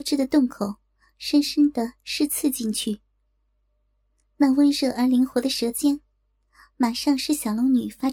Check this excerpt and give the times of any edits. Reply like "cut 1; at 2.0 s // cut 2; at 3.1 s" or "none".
none